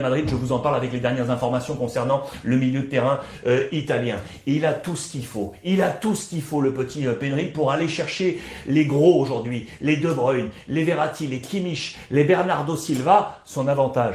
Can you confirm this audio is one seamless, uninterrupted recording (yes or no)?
yes